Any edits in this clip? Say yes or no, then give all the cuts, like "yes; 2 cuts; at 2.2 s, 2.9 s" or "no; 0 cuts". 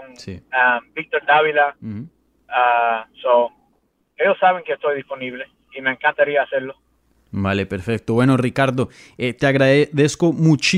no; 0 cuts